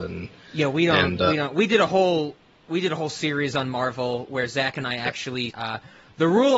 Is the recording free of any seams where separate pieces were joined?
no; 1 cut; at 5.5 s

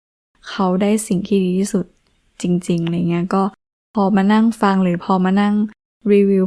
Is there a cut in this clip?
no; 0 cuts

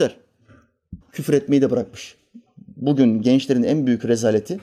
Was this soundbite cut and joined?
yes; 1 cut; at 1.0 s

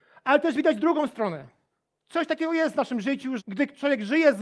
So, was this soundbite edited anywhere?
yes; 2 cuts; at 2.0 s, 3.4 s

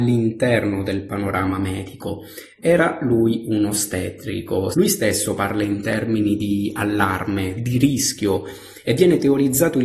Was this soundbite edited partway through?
yes; 2 cuts; at 4.7 s, 7.6 s

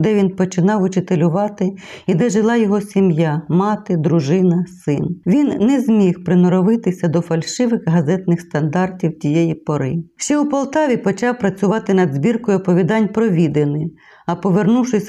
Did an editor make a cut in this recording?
no; 0 cuts

